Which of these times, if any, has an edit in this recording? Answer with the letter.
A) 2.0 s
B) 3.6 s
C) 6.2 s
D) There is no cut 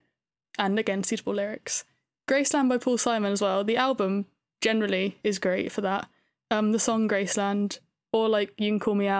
D